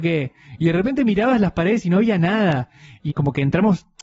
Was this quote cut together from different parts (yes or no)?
yes